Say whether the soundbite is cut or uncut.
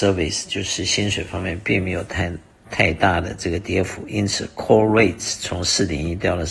uncut